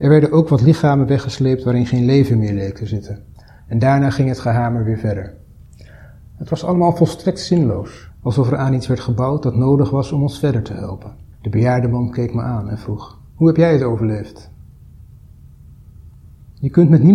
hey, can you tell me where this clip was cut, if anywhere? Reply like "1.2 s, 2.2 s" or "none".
8.1 s, 11.3 s, 13.3 s